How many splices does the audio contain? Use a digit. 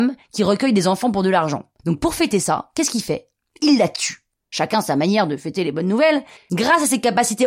2